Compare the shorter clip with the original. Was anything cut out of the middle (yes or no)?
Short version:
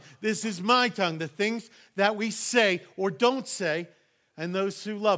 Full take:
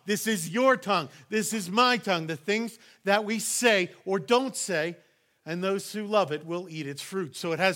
no